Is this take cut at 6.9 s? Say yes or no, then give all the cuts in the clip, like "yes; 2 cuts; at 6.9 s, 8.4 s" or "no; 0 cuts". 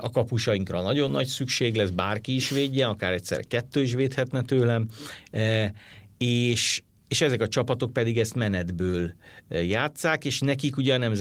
no; 0 cuts